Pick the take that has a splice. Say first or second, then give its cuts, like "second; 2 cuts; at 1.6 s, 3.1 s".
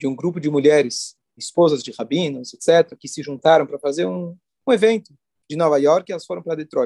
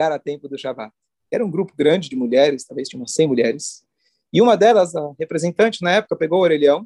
first; 1 cut; at 1.4 s